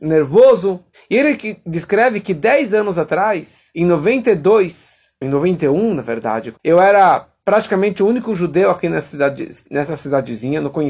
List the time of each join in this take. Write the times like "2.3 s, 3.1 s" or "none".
0.9 s, 6.5 s